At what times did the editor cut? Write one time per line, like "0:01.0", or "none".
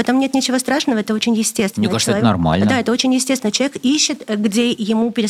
none